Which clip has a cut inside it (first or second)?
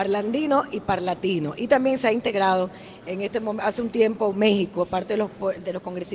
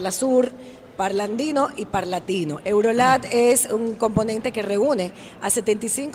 second